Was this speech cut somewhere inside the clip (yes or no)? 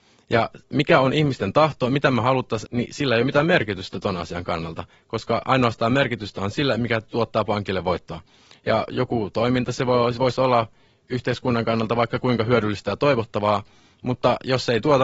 yes